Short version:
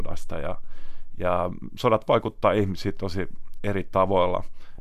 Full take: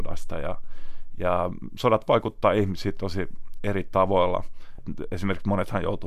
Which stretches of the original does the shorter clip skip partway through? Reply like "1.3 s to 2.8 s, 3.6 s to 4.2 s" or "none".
none